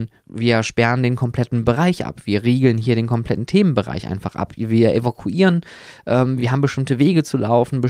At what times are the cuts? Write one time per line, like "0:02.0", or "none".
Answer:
none

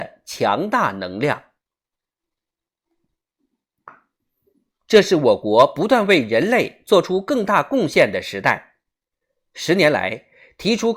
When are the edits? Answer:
none

